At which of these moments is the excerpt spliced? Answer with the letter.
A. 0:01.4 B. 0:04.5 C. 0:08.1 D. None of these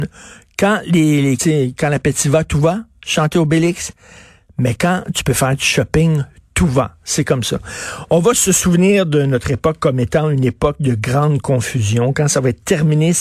A